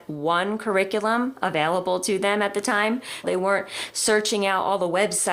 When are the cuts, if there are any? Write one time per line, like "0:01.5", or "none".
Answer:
0:03.2